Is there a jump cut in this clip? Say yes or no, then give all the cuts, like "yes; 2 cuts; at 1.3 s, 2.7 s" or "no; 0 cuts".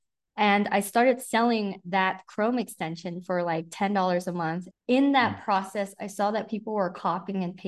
yes; 1 cut; at 4.7 s